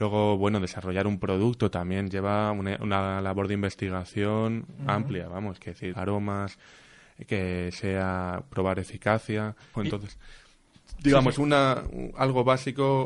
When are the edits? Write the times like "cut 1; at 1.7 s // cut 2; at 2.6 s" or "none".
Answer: cut 1; at 5.9 s // cut 2; at 9.7 s

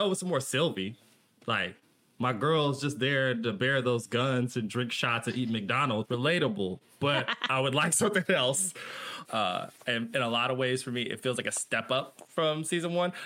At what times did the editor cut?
cut 1; at 6.0 s // cut 2; at 9.2 s

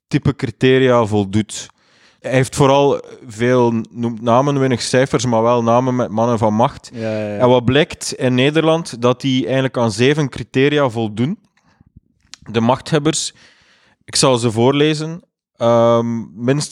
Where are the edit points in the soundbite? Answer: cut 1; at 2.2 s

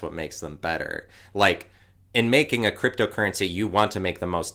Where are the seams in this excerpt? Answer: none

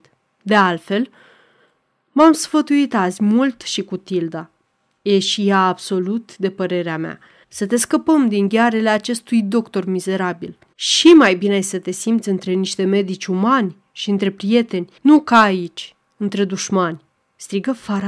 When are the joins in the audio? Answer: cut 1; at 7.4 s // cut 2; at 10.7 s // cut 3; at 15.0 s

